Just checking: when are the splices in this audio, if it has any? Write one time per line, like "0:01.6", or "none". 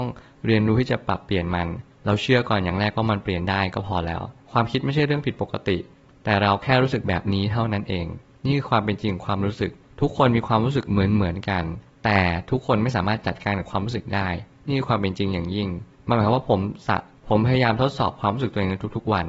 none